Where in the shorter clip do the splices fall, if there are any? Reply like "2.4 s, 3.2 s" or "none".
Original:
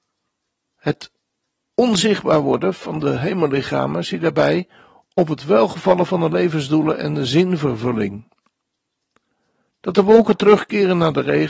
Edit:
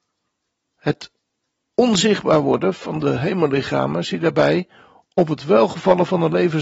none